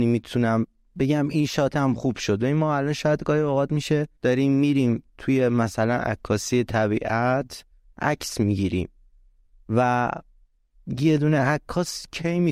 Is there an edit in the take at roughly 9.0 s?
no; 1 cut; at 4.2 s

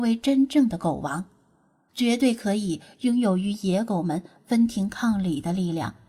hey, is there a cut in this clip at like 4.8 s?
no; 1 cut; at 1.9 s

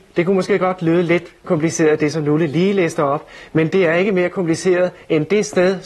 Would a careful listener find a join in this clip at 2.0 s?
no; 0 cuts

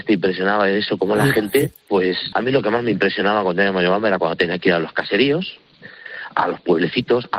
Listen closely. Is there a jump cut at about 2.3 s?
yes; 1 cut; at 2.3 s

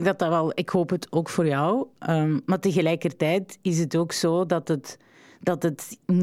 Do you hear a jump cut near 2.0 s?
no; 0 cuts

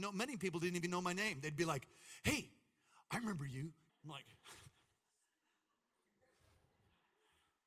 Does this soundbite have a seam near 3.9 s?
yes; 1 cut; at 3.9 s

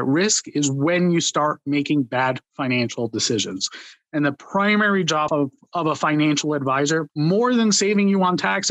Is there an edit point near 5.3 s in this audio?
yes; 2 cuts; at 5.3 s, 7.1 s

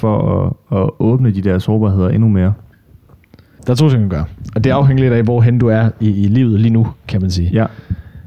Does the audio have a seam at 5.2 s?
no; 1 cut; at 3.6 s

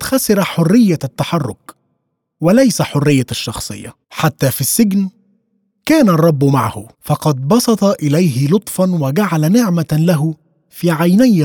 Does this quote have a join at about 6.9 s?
yes; 2 cuts; at 4.0 s, 6.9 s

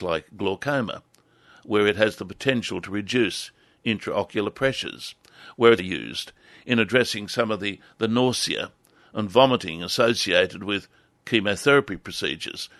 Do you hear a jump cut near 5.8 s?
yes; 1 cut; at 5.8 s

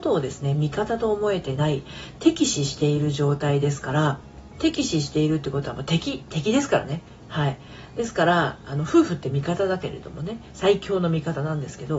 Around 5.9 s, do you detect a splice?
no; 1 cut; at 4.6 s

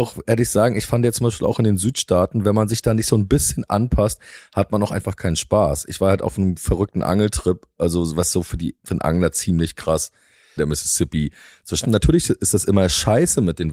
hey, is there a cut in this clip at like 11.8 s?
yes; 2 cuts; at 10.6 s, 11.8 s

